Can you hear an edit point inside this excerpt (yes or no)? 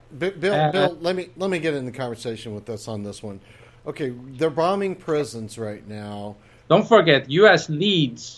yes